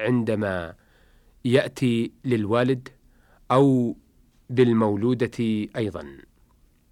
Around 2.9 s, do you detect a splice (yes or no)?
no